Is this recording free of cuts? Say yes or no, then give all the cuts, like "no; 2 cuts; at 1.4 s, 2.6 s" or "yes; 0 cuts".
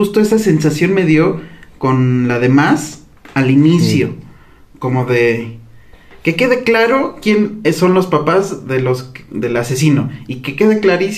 yes; 0 cuts